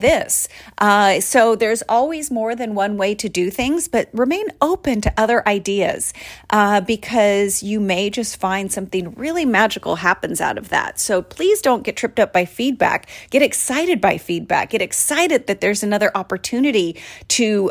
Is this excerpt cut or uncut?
uncut